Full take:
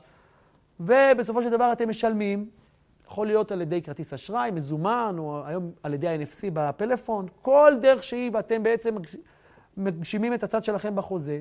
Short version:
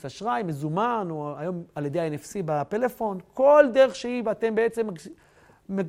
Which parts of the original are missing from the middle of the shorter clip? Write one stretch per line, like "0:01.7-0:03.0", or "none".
none